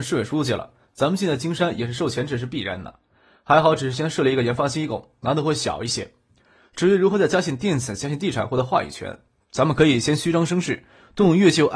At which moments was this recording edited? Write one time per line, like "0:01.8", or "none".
none